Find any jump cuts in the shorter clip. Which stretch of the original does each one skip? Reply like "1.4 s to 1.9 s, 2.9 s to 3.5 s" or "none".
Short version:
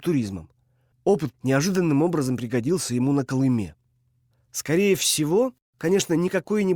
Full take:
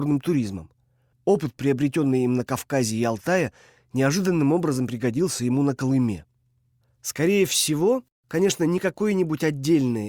1.5 s to 3.8 s